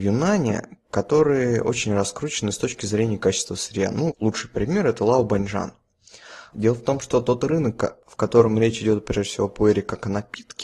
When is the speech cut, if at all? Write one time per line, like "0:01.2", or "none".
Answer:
0:04.1
0:06.5